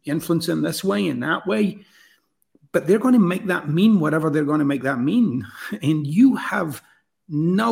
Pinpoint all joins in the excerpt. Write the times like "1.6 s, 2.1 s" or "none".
none